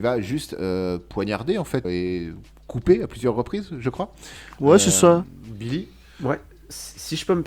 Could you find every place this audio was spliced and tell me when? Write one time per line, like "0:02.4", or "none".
0:01.8